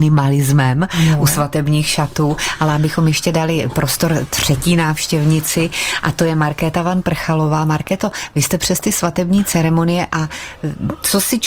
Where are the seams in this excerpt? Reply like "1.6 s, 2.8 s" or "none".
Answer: none